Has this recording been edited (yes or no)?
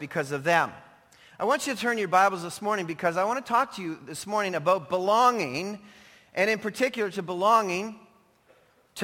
no